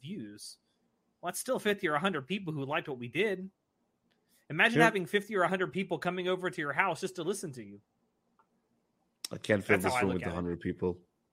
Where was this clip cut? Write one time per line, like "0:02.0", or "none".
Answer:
none